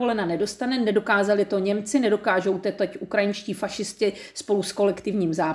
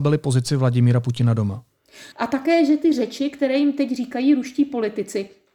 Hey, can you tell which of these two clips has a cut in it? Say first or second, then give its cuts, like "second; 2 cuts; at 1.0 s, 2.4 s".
second; 1 cut; at 2.1 s